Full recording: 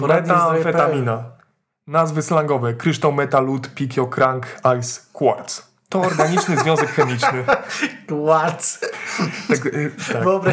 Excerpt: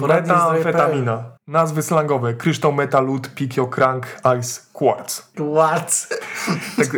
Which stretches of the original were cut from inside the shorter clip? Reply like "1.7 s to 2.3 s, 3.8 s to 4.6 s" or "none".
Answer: 1.4 s to 1.8 s, 5.7 s to 8.1 s